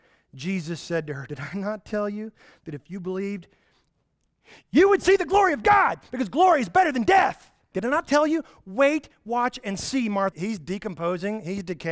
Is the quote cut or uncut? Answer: cut